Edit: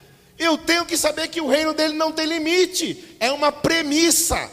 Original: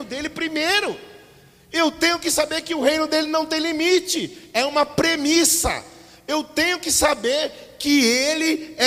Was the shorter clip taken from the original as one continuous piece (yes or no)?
yes